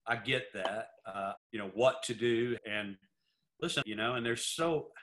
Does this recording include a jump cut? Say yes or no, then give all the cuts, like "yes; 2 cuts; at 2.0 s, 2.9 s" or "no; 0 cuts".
yes; 3 cuts; at 1.4 s, 2.6 s, 3.8 s